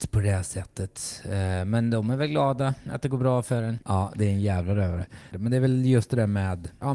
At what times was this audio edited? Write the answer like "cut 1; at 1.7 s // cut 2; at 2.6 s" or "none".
cut 1; at 3.8 s // cut 2; at 5.3 s